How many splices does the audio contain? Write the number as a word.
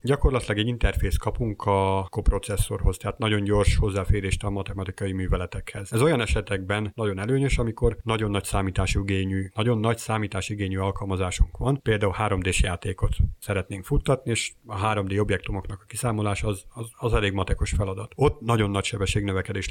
zero